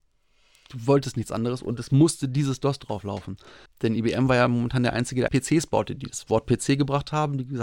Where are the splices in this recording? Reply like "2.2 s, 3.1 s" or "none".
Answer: 3.7 s, 5.3 s